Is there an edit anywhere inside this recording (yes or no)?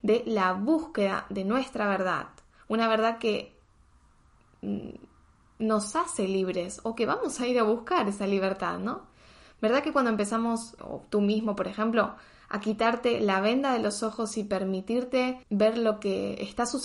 yes